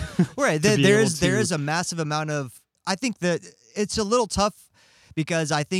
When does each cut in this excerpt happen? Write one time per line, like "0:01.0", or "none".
0:03.7